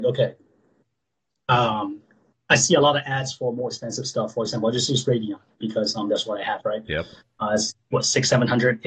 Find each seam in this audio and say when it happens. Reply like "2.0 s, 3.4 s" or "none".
none